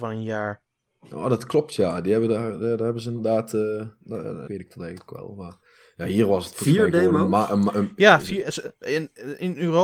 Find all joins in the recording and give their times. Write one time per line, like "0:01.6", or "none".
0:04.5

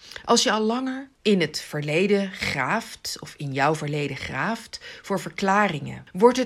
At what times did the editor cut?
none

